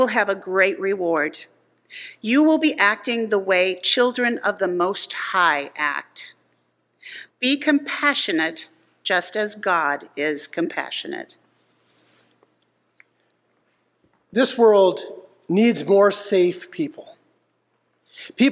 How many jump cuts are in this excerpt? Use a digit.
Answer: 1